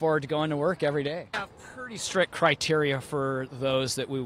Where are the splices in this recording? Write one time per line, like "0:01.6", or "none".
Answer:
0:01.3